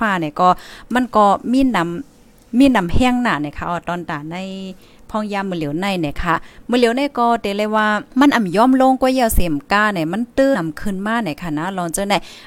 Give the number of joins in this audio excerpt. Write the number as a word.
two